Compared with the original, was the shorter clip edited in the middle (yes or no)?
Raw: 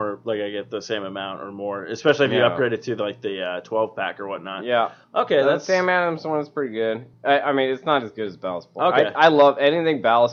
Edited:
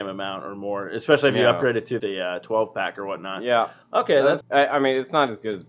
yes